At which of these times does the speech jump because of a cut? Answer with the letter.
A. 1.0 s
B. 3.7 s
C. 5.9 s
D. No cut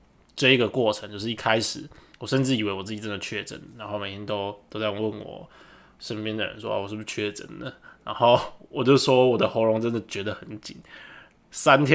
D